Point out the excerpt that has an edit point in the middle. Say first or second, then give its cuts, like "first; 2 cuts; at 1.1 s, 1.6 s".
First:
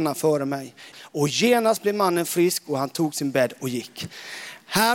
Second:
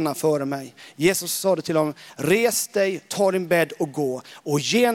first; 1 cut; at 0.9 s